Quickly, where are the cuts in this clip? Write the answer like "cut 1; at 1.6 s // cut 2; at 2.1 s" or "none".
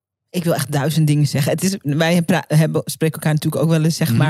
none

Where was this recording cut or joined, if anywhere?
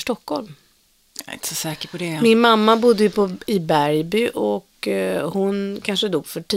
none

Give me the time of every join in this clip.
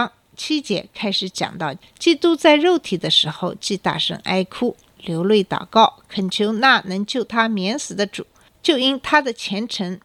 none

